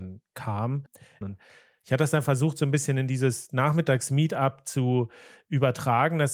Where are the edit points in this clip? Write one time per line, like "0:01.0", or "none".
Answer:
0:01.2